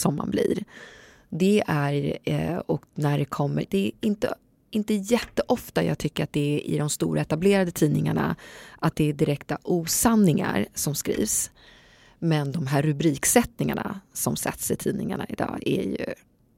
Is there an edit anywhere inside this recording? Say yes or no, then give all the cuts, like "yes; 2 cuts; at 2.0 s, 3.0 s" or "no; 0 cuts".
yes; 1 cut; at 3.6 s